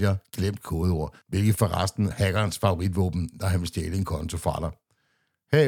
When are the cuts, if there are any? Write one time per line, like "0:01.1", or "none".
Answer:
0:02.1